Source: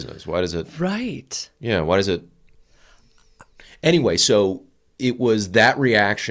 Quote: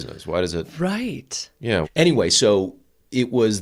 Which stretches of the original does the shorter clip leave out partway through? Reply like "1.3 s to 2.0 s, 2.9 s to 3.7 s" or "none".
1.8 s to 3.7 s